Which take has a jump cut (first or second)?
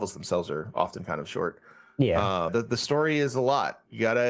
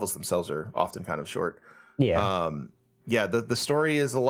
first